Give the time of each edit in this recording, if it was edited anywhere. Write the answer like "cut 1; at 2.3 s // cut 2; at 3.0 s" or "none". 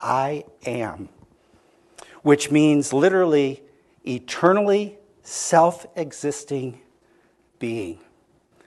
none